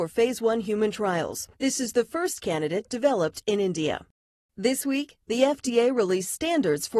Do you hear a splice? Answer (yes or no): yes